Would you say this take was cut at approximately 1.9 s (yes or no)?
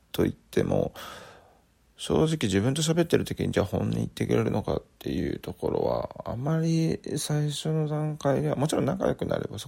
no